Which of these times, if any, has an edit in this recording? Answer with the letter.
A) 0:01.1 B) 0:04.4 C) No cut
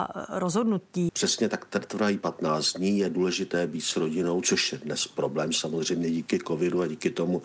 A